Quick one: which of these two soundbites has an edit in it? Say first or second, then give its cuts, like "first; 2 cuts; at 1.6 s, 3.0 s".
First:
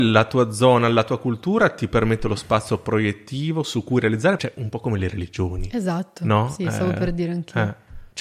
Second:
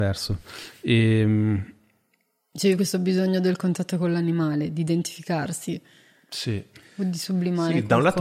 first; 1 cut; at 4.4 s